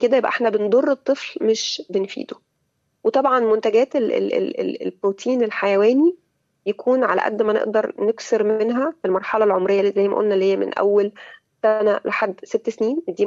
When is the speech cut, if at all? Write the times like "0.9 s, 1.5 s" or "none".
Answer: none